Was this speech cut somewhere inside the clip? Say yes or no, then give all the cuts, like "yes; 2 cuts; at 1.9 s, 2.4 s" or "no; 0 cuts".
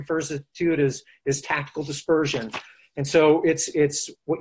no; 0 cuts